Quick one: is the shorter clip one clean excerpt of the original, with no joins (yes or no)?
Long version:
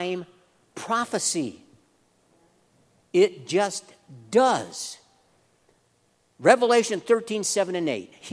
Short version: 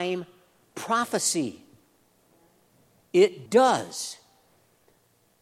no